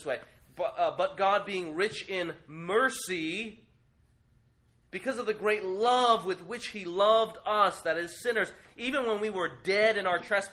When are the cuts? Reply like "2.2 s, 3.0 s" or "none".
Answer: none